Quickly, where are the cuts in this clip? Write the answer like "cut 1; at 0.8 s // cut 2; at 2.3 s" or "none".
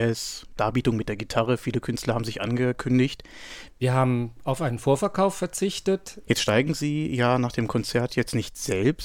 cut 1; at 3.7 s // cut 2; at 6.2 s

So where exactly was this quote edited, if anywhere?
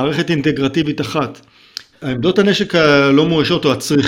cut 1; at 1.9 s

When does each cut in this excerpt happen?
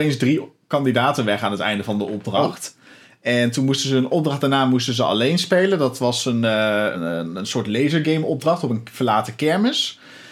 cut 1; at 6.9 s

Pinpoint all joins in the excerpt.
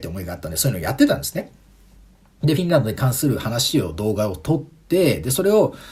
none

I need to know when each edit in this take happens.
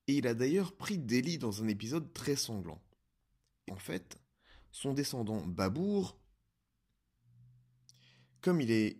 cut 1; at 3.7 s // cut 2; at 6.3 s

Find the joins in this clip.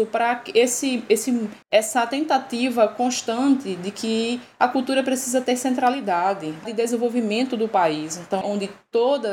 cut 1; at 1.6 s // cut 2; at 6.7 s // cut 3; at 8.4 s

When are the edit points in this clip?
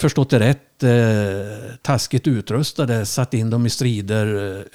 none

